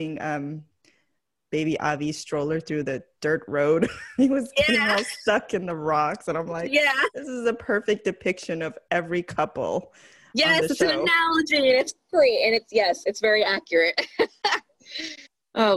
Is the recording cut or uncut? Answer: uncut